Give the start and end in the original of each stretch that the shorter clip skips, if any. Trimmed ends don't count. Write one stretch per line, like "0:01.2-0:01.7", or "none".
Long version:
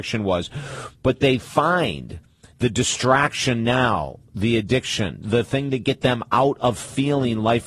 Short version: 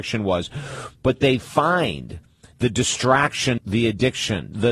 0:03.6-0:04.3